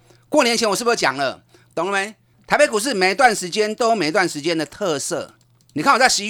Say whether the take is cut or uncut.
cut